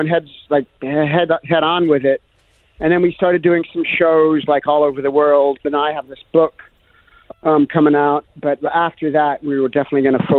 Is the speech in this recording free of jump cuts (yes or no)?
no